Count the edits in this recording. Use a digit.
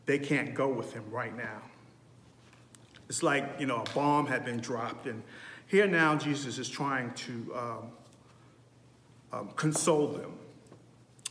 0